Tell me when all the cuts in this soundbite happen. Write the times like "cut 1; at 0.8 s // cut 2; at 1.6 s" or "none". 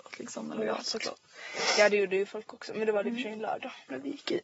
none